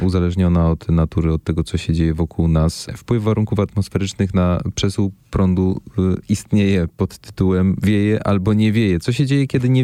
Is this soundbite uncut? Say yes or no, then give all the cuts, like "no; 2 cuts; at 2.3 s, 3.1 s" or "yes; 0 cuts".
yes; 0 cuts